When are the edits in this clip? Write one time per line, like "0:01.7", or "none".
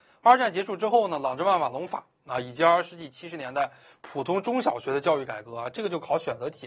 none

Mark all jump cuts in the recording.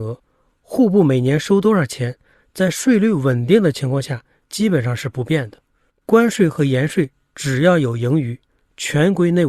0:05.9

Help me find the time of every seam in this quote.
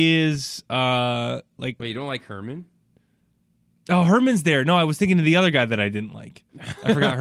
0:01.8

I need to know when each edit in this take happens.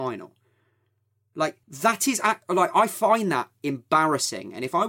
0:01.6

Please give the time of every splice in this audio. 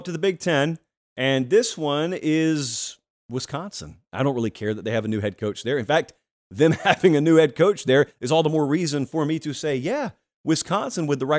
none

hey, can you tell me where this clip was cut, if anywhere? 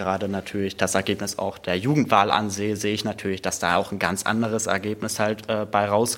none

